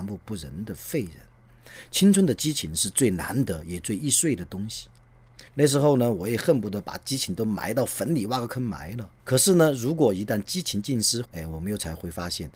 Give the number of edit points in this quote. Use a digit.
3